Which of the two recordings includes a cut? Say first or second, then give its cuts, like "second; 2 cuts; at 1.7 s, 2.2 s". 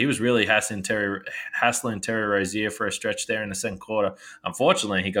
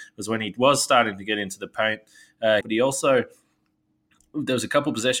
second; 1 cut; at 2.6 s